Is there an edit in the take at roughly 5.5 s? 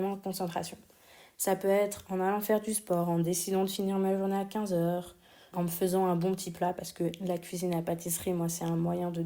yes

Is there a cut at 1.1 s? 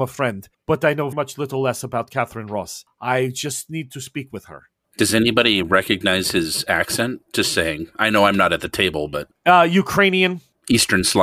yes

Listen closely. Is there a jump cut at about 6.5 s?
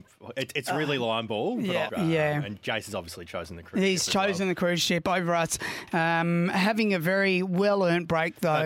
no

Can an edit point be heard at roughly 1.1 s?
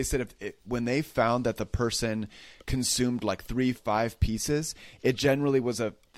no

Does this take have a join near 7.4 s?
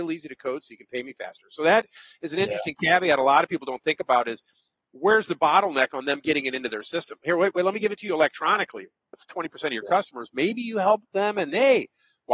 no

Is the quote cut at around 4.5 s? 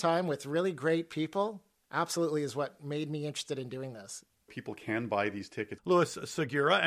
yes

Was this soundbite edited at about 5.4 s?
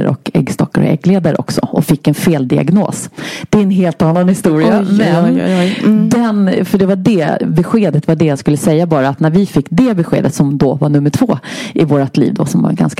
no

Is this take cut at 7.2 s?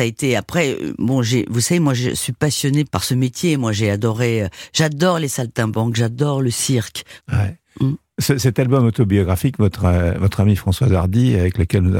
yes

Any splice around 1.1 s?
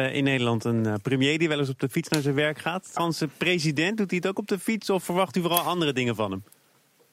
no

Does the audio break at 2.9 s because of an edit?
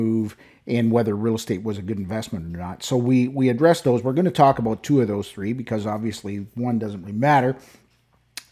no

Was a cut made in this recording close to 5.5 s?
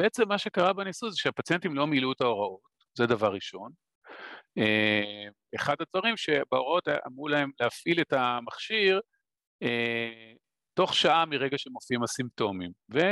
yes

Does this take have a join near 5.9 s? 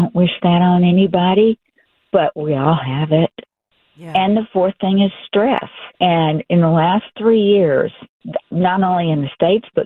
yes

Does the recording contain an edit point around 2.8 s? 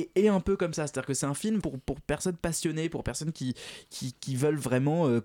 no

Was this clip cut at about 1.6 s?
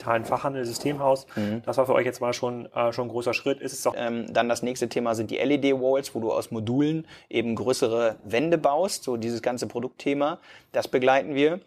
no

